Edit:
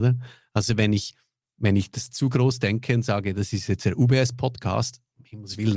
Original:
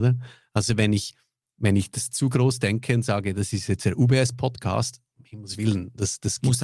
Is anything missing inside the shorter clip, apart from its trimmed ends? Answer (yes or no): no